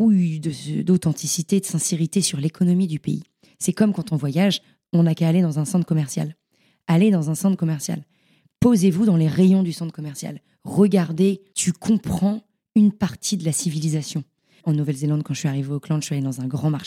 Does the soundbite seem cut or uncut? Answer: cut